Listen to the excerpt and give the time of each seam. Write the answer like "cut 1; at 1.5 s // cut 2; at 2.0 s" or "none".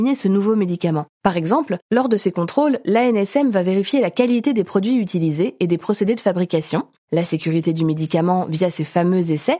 cut 1; at 1.1 s